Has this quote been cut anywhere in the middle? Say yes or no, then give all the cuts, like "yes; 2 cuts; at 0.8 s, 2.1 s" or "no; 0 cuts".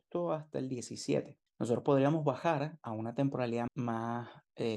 yes; 2 cuts; at 1.5 s, 3.7 s